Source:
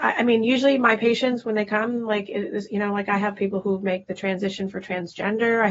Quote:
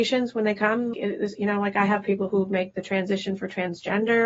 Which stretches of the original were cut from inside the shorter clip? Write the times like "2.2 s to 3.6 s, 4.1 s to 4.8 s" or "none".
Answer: 2.0 s to 2.3 s